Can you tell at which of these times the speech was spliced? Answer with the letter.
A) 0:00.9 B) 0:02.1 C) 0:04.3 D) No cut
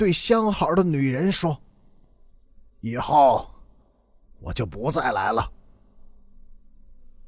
C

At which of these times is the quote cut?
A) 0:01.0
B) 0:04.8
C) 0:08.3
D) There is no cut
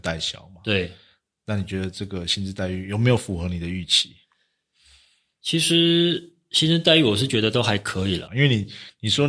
C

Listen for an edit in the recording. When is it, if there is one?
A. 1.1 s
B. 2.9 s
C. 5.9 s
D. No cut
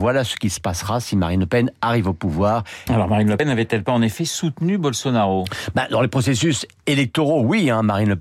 B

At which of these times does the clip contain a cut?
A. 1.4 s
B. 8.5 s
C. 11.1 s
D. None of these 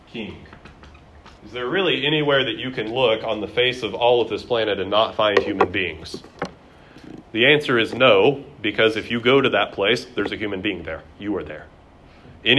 A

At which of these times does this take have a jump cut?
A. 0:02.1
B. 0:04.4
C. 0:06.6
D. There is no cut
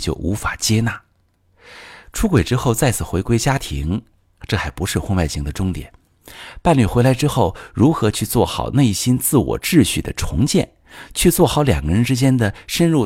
D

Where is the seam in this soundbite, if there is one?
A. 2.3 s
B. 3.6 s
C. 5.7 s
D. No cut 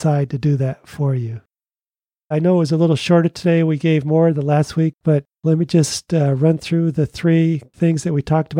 A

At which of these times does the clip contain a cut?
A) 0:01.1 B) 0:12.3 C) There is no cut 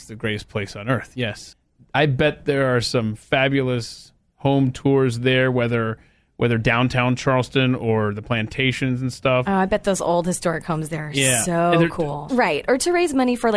B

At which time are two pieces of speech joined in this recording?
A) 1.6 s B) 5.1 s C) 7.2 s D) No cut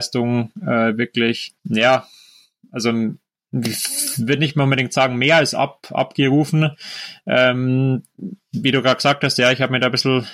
A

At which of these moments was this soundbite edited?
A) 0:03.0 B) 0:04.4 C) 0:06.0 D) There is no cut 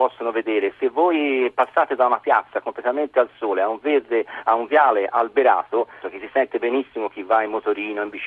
C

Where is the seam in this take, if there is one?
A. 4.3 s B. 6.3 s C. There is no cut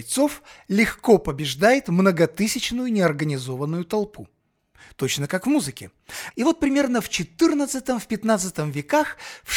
B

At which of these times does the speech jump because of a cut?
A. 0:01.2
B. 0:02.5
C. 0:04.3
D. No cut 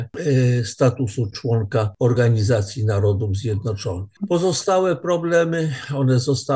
D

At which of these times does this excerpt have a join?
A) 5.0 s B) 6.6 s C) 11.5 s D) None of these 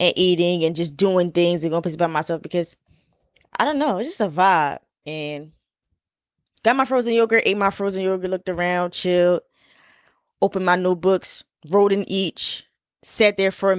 A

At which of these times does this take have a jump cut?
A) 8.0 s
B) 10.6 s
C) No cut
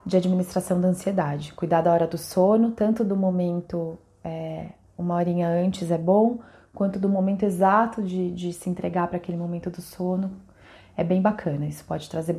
C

